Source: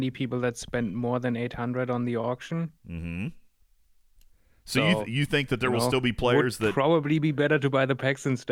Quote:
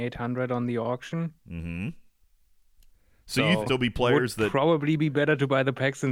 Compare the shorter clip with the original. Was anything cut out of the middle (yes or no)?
yes